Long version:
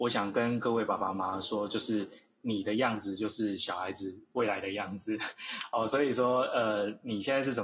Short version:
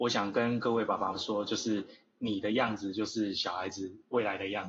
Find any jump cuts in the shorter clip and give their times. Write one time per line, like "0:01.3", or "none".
0:01.1